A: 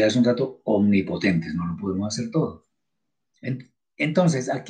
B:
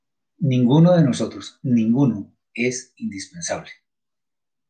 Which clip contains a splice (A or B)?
A